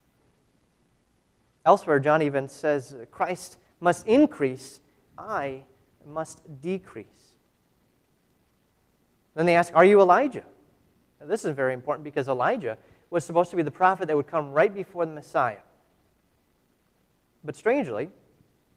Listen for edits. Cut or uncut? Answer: uncut